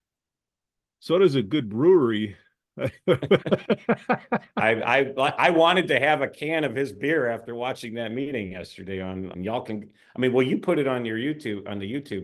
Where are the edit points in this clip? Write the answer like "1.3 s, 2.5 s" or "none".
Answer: 9.3 s